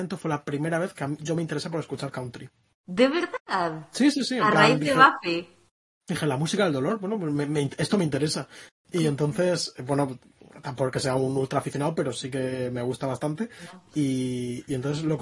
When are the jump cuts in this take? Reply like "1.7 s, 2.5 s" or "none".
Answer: none